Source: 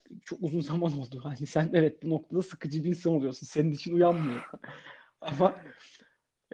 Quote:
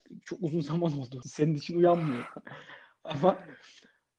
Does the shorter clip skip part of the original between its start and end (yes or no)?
yes